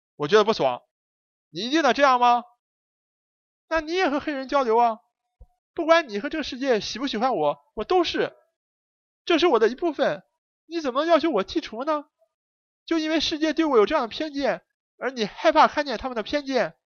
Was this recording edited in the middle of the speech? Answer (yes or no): yes